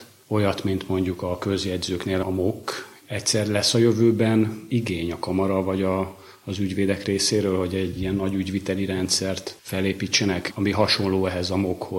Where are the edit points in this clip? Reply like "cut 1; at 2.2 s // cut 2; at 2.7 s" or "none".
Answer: cut 1; at 2.2 s // cut 2; at 9.6 s